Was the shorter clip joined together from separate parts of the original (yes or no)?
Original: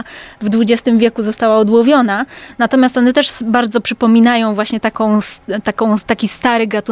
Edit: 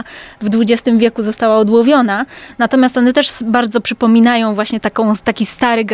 yes